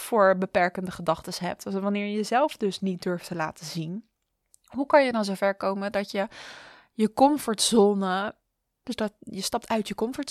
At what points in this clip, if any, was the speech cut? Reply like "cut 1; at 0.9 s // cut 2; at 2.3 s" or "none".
cut 1; at 8.8 s